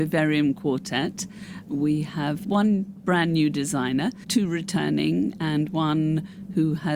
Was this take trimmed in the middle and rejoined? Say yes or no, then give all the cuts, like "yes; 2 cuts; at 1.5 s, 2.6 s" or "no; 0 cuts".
no; 0 cuts